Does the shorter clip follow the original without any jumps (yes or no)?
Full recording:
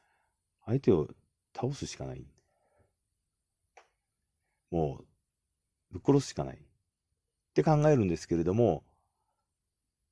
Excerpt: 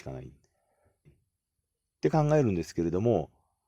no